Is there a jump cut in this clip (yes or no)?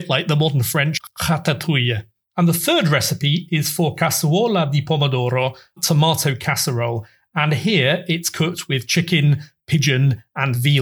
no